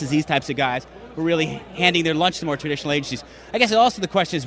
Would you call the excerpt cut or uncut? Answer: uncut